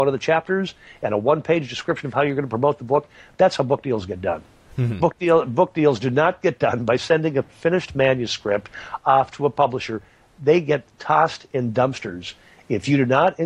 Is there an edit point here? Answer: no; 0 cuts

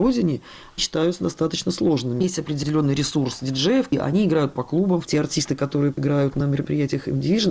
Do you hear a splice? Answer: yes; 3 cuts; at 2.2 s, 3.9 s, 5.0 s

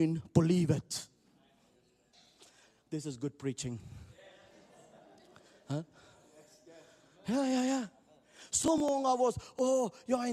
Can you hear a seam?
no; 0 cuts

